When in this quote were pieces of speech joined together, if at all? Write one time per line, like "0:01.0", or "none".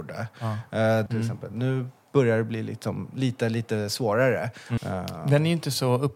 0:01.1
0:04.8